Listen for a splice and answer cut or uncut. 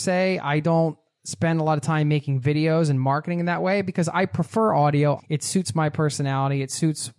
cut